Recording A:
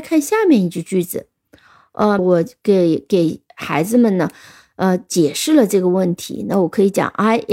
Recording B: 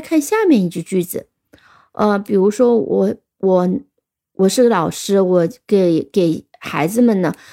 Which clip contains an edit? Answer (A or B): A